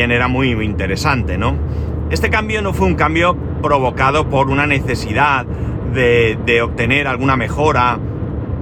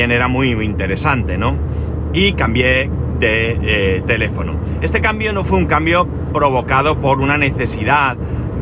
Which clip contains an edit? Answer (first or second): first